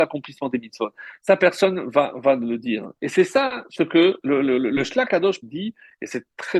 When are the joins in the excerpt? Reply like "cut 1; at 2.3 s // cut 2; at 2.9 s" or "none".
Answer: cut 1; at 3.0 s // cut 2; at 5.4 s